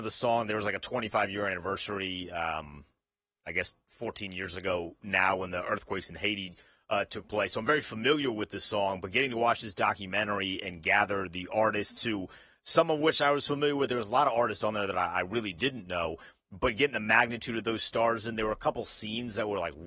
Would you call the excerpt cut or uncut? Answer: uncut